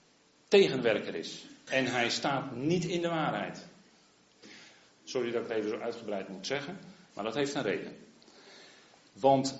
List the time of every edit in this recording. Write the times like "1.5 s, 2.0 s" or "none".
1.7 s, 4.9 s